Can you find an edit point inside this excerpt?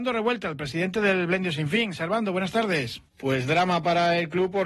yes; 1 cut; at 3.1 s

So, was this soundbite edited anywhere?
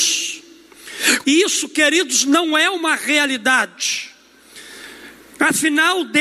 yes; 1 cut; at 1.2 s

